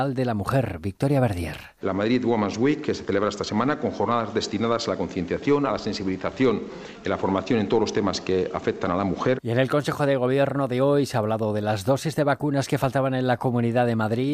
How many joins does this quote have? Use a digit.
2